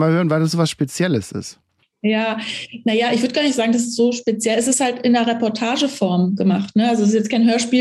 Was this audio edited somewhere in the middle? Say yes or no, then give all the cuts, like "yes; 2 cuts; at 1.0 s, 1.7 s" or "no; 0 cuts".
no; 0 cuts